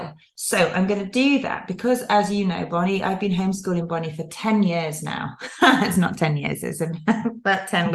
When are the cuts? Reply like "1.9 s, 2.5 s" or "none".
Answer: none